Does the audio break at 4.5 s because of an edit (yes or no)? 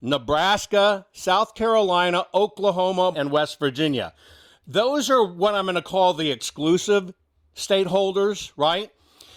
no